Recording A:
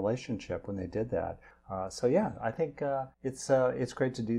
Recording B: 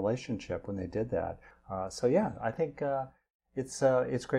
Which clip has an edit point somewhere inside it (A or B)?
A